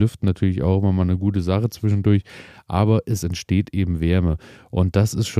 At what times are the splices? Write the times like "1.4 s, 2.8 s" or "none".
none

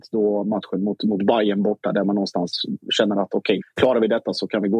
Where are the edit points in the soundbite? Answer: 3.6 s

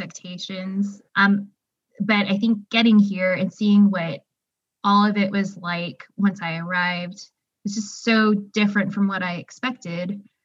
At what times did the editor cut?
1.1 s

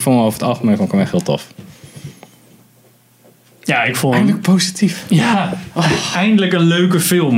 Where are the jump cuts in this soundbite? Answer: none

